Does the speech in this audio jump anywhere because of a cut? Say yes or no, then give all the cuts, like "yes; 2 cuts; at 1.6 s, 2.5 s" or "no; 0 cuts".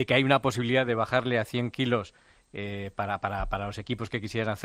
no; 0 cuts